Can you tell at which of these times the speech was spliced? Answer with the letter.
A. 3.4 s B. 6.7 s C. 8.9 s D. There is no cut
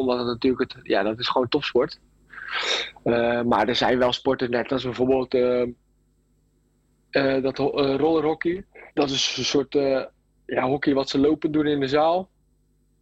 C